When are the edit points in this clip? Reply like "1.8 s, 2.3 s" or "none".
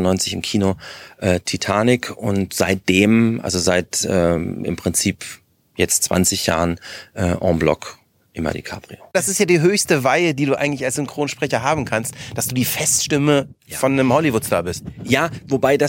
none